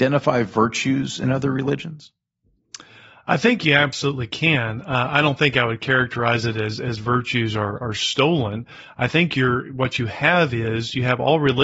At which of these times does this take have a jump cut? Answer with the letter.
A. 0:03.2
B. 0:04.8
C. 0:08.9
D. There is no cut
D